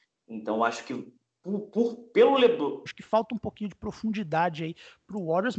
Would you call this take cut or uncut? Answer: cut